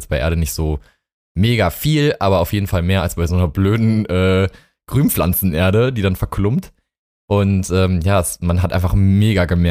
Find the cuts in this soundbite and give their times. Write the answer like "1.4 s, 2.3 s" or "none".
none